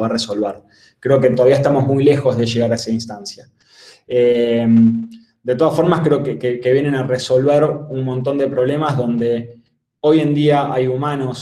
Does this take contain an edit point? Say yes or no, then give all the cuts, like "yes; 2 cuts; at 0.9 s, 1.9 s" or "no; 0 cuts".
no; 0 cuts